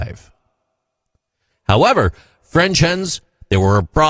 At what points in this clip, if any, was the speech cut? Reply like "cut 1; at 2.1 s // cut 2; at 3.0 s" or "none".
cut 1; at 1.5 s